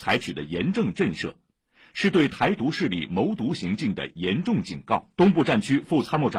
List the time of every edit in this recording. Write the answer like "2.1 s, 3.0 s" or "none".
5.1 s